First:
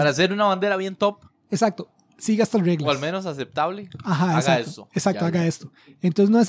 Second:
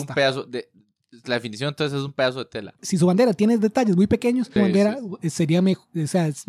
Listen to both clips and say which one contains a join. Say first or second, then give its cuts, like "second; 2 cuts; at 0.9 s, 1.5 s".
second; 2 cuts; at 2.8 s, 4.6 s